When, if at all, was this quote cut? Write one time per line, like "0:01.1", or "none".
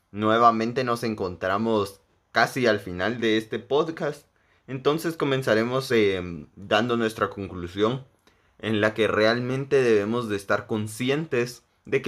none